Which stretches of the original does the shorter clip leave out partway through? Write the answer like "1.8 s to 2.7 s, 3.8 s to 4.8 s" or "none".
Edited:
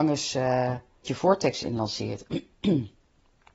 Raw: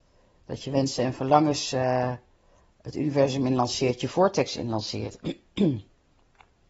2.4 s to 4.0 s